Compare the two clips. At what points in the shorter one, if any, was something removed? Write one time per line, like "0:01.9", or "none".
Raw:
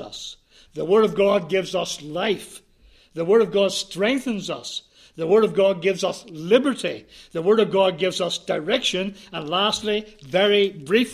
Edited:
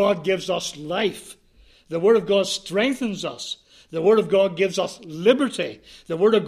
none